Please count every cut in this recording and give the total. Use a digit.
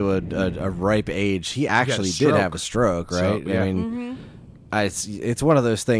0